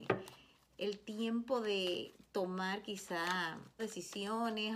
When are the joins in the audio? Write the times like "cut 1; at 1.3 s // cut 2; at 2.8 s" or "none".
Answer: cut 1; at 3.8 s